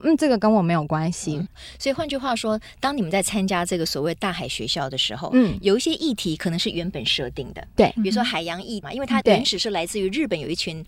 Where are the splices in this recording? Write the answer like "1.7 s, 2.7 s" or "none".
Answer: 8.8 s